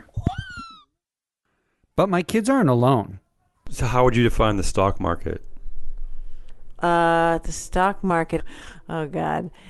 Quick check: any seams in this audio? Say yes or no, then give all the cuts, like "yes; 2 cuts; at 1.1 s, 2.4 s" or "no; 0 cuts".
yes; 2 cuts; at 3.5 s, 8.4 s